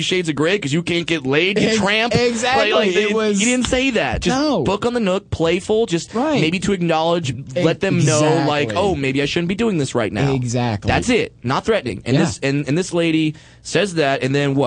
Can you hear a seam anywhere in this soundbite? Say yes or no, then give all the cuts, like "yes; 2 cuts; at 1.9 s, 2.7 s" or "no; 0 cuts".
no; 0 cuts